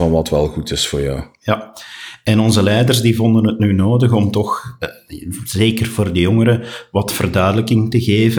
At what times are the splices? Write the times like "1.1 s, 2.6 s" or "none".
none